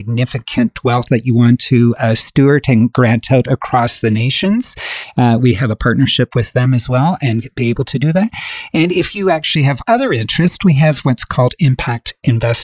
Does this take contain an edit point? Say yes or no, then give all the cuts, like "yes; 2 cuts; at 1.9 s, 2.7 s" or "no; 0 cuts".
no; 0 cuts